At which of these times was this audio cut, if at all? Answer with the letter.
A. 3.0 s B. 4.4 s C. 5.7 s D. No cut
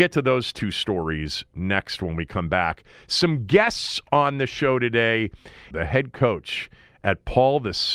C